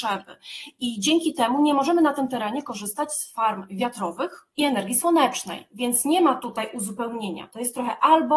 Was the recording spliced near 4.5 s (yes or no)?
yes